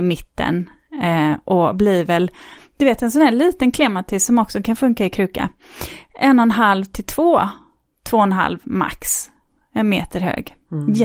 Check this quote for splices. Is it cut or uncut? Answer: uncut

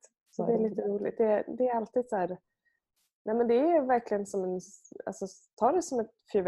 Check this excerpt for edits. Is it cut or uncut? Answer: uncut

